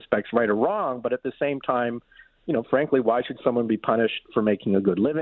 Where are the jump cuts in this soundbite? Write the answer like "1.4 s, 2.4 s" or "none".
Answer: none